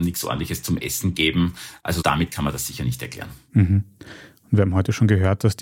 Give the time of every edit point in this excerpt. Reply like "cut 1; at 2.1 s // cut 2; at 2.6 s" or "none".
none